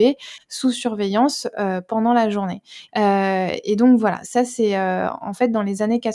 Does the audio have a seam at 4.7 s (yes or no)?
no